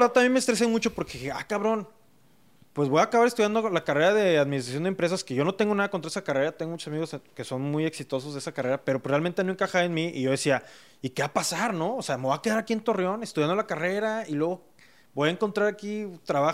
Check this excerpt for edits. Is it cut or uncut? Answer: uncut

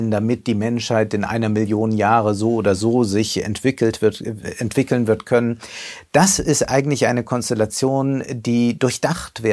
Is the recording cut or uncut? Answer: uncut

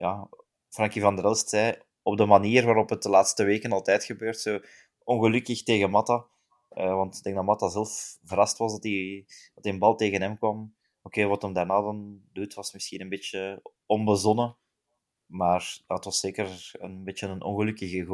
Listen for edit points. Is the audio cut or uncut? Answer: uncut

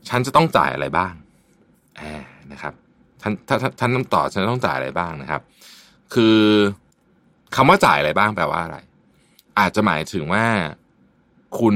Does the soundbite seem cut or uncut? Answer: uncut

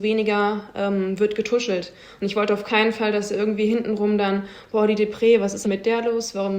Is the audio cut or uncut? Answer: cut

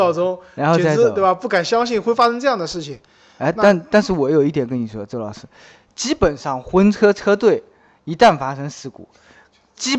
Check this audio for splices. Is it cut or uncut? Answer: uncut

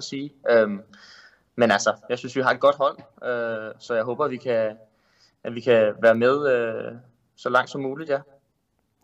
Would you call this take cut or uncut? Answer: uncut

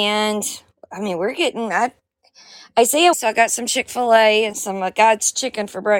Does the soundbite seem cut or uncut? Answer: cut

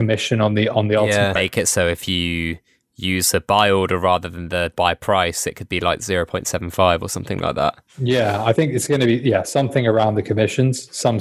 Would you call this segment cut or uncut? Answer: cut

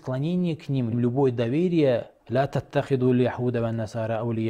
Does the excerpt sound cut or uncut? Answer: cut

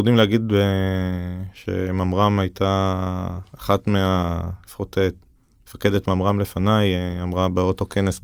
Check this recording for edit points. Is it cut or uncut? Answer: uncut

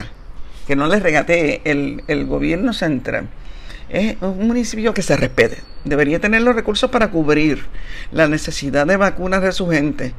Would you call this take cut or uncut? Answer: uncut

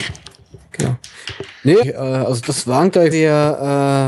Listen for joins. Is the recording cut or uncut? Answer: cut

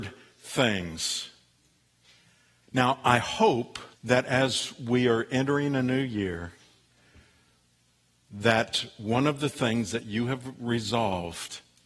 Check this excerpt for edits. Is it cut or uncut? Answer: cut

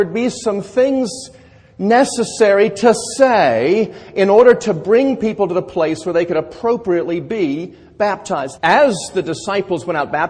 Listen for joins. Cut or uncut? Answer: cut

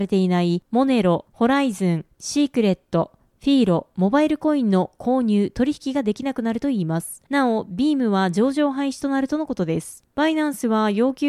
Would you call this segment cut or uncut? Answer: uncut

